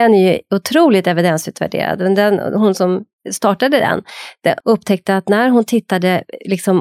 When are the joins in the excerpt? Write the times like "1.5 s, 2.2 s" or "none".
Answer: 4.6 s